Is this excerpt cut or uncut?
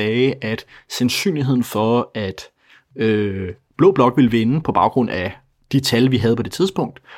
uncut